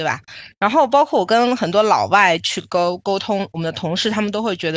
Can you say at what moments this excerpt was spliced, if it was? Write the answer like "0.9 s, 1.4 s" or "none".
none